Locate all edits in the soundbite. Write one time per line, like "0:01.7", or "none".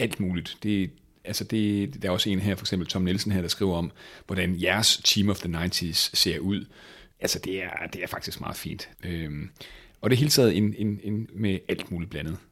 0:08.9
0:11.3